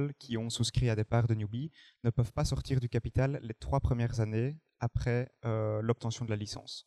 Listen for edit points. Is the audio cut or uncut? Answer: uncut